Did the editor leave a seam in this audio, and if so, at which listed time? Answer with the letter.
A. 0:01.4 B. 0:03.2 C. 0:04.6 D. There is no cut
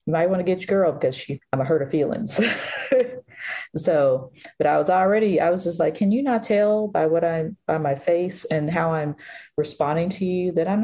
A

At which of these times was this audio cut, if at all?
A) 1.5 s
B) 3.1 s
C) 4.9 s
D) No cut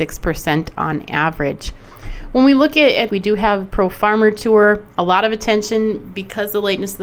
B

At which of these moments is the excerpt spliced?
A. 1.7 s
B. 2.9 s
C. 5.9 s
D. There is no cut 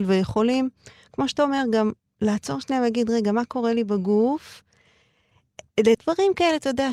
C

